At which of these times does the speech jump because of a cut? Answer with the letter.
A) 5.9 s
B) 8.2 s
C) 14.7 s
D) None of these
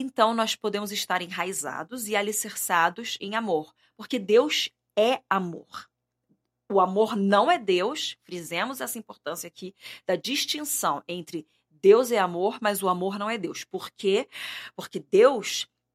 D